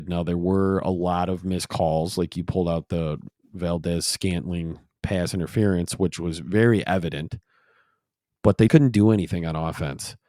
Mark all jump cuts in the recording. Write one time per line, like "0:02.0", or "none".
0:08.7